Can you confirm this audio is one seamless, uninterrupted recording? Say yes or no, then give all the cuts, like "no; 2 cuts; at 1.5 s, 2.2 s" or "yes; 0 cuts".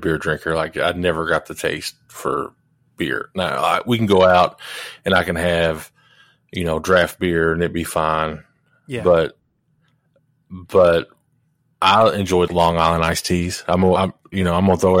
no; 2 cuts; at 12.5 s, 14.0 s